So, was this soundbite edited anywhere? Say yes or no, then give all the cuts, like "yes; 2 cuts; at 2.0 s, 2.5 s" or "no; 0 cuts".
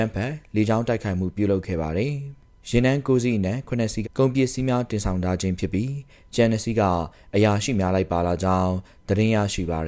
yes; 1 cut; at 4.0 s